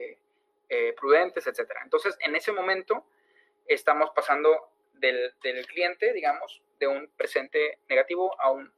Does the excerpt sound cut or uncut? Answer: uncut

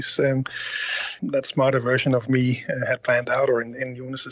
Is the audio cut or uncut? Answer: cut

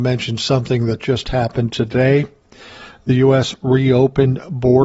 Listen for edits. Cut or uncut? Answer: uncut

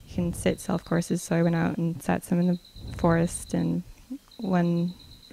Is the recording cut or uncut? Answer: uncut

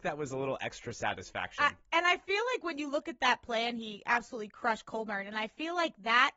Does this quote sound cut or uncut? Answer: uncut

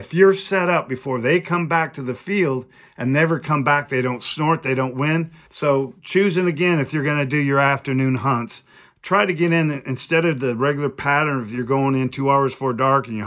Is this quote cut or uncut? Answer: cut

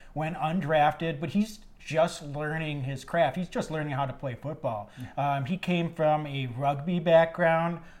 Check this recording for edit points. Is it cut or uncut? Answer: uncut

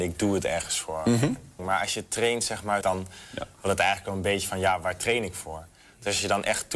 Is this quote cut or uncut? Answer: cut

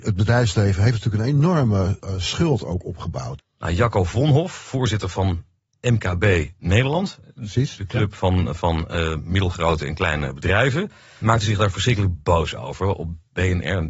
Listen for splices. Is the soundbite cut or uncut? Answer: cut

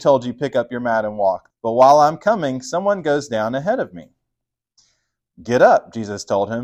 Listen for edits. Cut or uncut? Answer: cut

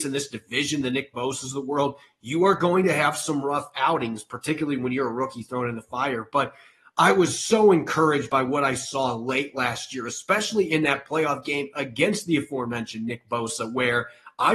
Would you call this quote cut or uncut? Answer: uncut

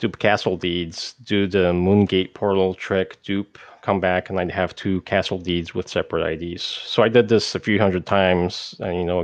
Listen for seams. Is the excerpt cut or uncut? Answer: uncut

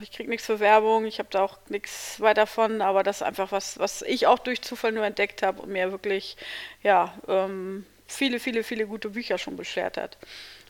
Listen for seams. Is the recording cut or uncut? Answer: uncut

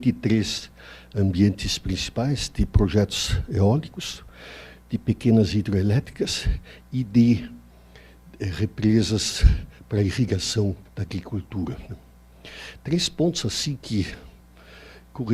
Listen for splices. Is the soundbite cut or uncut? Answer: cut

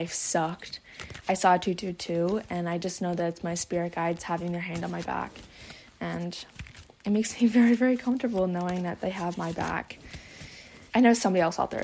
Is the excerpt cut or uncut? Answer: cut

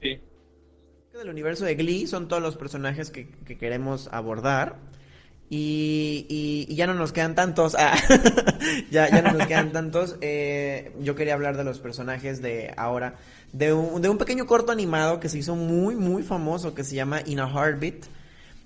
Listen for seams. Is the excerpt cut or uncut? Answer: cut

